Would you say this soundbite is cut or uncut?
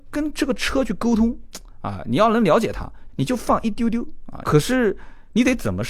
cut